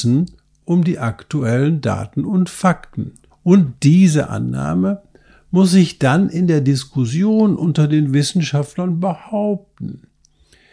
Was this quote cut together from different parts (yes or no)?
yes